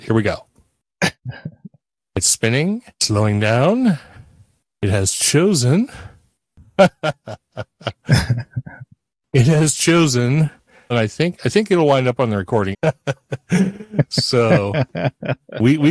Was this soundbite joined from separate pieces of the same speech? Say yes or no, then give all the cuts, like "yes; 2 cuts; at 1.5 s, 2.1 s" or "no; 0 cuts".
yes; 3 cuts; at 2.9 s, 10.9 s, 12.7 s